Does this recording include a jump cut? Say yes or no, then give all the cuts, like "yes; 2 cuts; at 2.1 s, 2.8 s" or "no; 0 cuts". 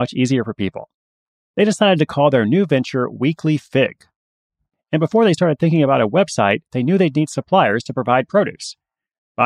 no; 0 cuts